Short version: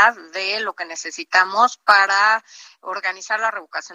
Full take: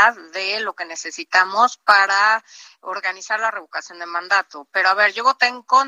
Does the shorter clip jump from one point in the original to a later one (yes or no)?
no